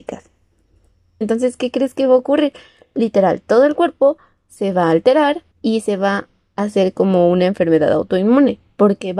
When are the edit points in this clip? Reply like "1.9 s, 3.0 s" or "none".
1.2 s, 5.5 s